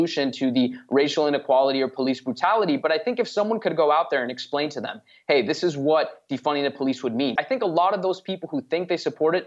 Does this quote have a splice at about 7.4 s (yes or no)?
yes